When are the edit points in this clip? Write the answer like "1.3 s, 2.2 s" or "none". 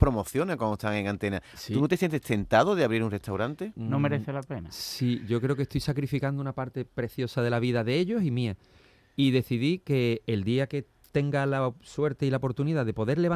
3.7 s